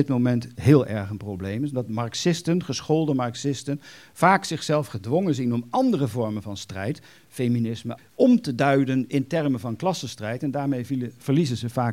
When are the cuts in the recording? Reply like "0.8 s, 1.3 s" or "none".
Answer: 8.0 s